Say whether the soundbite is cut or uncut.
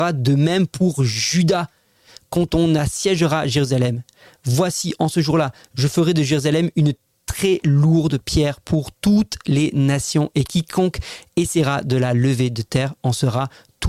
uncut